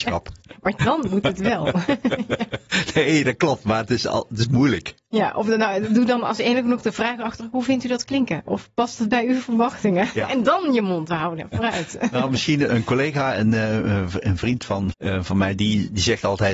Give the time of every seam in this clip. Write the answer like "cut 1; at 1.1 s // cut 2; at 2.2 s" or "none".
cut 1; at 12.7 s // cut 2; at 14.9 s